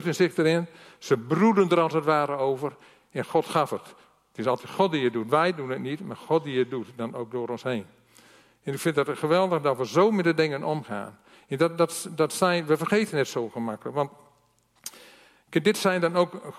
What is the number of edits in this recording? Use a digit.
0